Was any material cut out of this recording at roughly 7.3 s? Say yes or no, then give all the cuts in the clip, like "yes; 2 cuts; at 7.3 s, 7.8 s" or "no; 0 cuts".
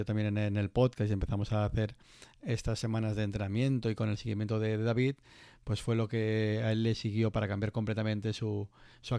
yes; 1 cut; at 7.3 s